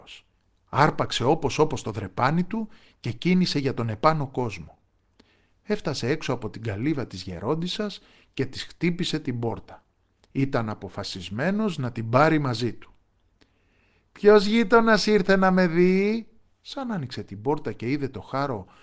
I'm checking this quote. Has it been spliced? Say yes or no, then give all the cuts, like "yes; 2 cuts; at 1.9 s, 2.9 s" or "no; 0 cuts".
yes; 1 cut; at 16.5 s